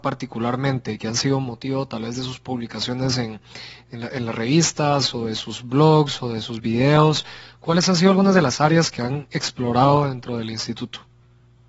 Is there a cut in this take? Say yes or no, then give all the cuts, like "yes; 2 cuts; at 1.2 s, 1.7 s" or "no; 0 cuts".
no; 0 cuts